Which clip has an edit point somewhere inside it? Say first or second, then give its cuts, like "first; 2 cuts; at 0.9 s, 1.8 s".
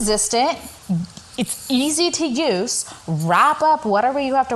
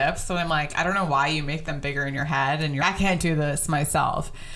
second; 1 cut; at 2.8 s